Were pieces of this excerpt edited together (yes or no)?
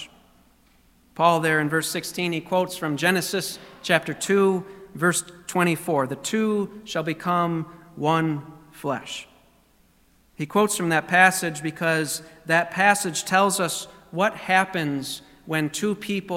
no